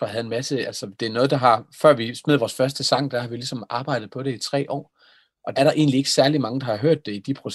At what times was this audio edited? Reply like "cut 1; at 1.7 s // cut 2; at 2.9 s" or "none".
cut 1; at 5.6 s